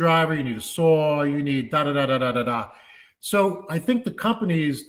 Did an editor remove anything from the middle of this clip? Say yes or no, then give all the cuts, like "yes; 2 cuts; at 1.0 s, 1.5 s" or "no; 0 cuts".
no; 0 cuts